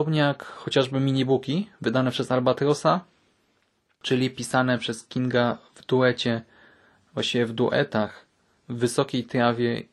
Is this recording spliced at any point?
no; 0 cuts

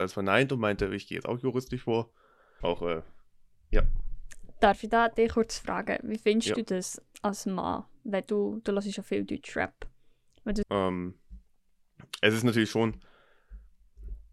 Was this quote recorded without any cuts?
no; 2 cuts; at 2.6 s, 10.6 s

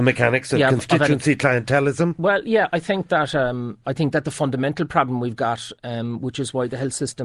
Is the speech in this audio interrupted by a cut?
yes; 1 cut; at 3.8 s

